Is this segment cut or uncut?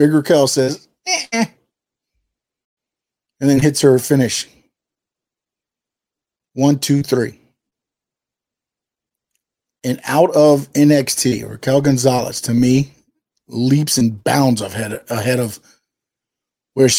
uncut